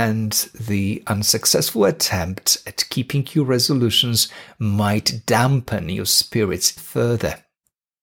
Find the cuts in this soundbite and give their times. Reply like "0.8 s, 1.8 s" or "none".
6.8 s